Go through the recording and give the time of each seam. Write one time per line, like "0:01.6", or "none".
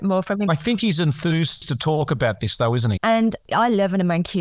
0:03.0